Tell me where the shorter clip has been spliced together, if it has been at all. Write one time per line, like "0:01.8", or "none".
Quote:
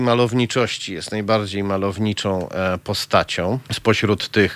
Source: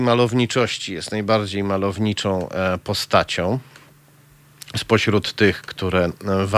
0:03.7